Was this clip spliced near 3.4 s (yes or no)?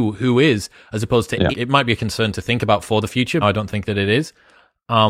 yes